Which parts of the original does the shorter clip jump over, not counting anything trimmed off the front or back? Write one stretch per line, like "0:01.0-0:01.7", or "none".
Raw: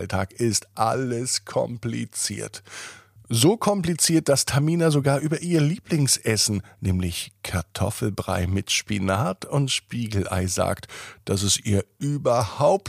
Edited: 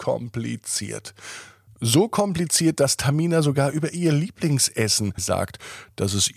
0:06.7-0:10.5